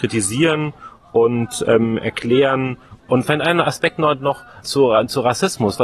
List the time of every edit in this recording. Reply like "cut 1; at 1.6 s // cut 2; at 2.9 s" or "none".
cut 1; at 3.0 s // cut 2; at 4.6 s